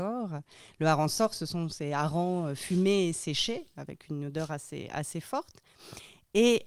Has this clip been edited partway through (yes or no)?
no